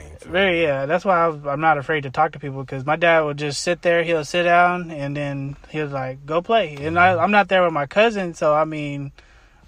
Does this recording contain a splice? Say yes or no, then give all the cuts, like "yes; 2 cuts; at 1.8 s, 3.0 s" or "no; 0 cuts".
no; 0 cuts